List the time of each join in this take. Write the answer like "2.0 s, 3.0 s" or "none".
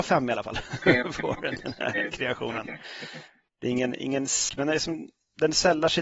4.5 s